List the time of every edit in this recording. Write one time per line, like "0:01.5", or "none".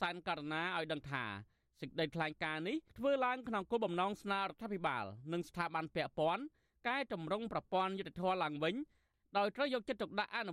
0:02.9